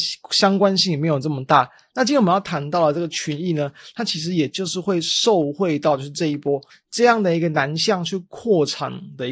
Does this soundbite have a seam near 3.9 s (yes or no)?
no